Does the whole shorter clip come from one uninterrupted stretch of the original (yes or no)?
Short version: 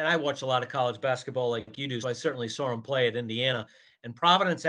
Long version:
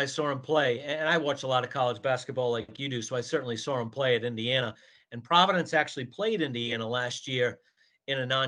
no